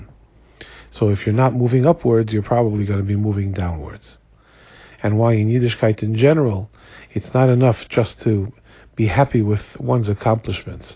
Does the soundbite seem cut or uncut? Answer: cut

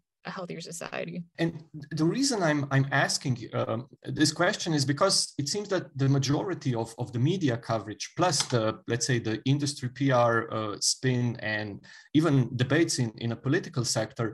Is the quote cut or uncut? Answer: cut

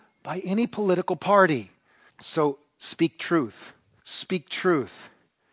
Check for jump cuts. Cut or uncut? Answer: cut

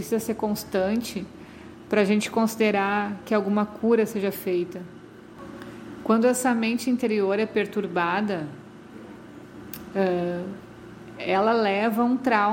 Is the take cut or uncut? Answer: uncut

